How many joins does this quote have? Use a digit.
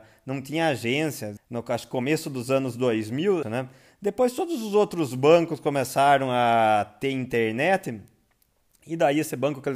2